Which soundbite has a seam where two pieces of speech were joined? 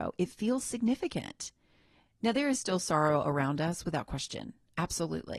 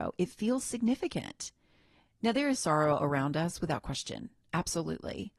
second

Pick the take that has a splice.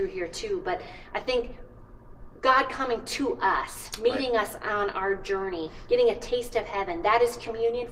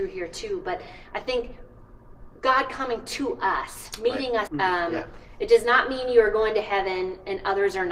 second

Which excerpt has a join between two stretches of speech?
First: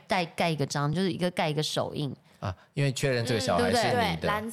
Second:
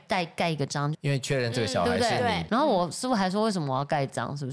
second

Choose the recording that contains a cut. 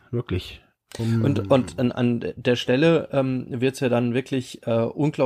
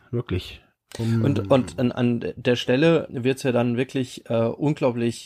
second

